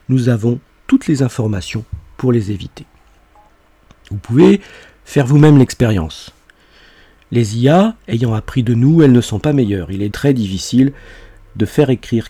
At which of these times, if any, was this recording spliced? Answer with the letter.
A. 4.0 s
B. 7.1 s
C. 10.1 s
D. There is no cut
C